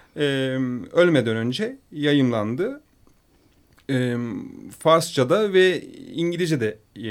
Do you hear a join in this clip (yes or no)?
no